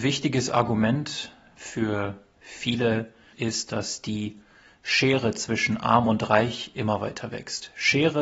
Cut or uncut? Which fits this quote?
cut